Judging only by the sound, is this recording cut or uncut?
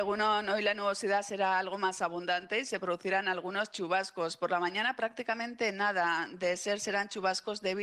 uncut